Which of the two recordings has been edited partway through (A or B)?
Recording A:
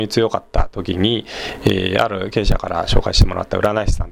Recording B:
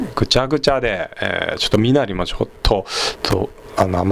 B